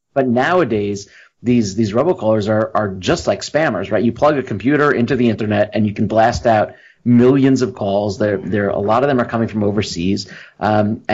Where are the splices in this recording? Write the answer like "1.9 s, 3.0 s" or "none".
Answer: none